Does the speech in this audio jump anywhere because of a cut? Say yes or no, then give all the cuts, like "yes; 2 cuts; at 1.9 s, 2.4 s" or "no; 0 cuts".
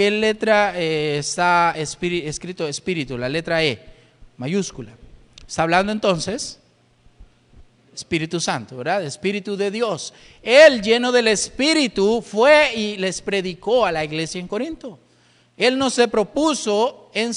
no; 0 cuts